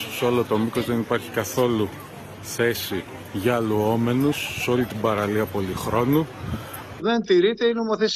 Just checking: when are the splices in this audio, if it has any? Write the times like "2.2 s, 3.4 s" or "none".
7.0 s